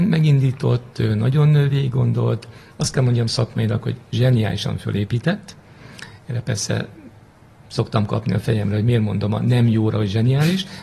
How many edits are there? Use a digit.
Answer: 0